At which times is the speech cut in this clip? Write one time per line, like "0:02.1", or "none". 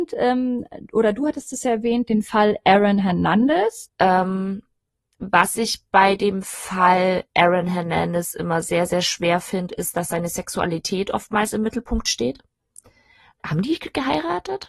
0:03.9
0:13.4